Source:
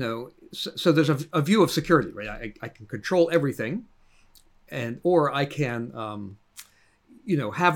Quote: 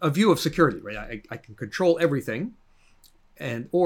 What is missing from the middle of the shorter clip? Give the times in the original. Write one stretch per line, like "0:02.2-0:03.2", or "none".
none